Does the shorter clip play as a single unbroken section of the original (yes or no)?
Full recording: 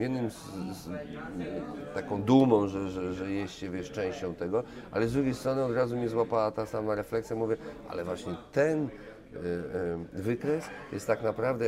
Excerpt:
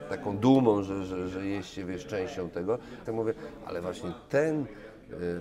no